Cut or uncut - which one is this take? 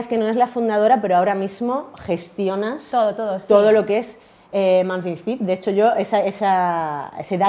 uncut